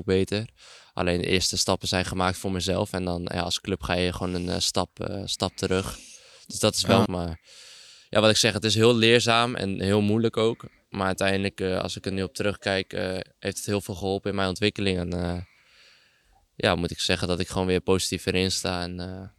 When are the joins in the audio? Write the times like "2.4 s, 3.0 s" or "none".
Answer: 7.1 s